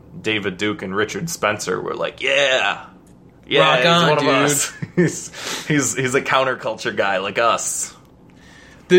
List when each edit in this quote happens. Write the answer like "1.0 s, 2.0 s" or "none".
none